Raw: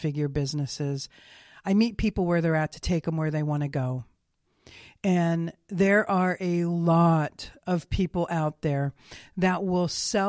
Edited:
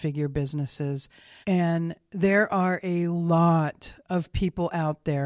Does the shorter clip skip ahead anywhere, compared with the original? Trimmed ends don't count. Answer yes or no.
yes